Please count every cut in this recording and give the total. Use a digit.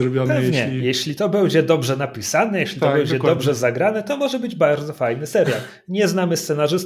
0